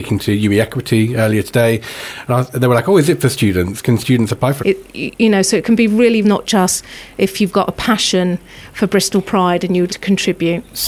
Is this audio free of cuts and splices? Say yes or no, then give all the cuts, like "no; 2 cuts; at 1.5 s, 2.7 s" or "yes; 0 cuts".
no; 3 cuts; at 4.6 s, 6.2 s, 9.9 s